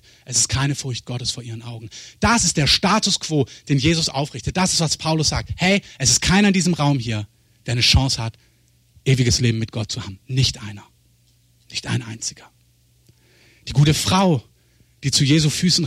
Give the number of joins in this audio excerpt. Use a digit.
0